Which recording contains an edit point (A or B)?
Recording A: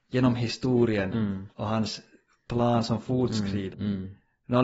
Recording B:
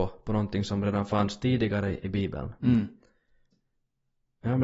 A